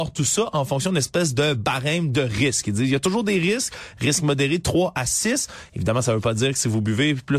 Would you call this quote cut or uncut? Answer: cut